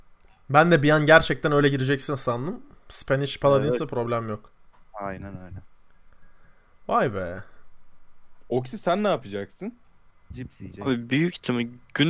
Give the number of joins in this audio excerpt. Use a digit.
0